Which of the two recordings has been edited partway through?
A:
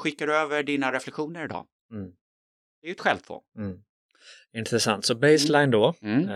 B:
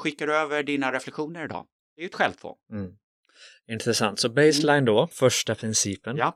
B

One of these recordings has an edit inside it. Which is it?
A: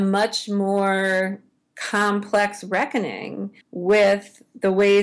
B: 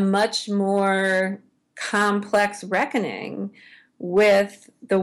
A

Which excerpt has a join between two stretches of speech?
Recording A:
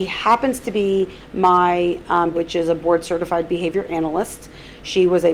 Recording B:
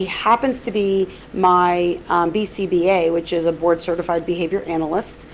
A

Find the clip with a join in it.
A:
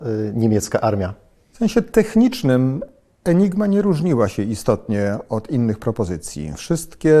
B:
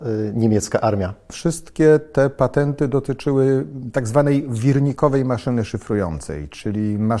B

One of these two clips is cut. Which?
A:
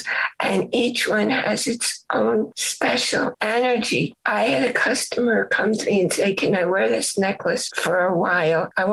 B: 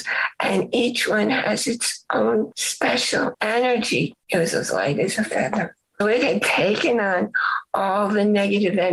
B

